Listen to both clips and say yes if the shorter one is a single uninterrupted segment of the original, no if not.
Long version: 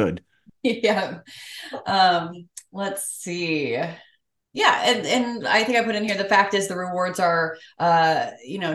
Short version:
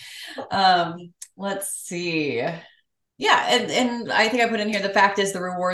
yes